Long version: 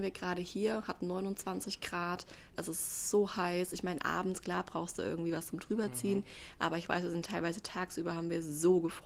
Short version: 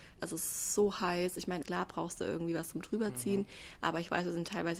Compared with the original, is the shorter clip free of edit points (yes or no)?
no